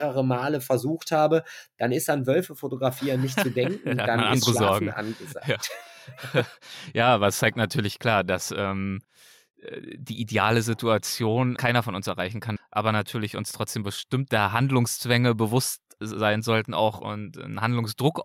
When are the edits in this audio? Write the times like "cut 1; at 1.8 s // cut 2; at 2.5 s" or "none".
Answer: cut 1; at 11.6 s // cut 2; at 12.6 s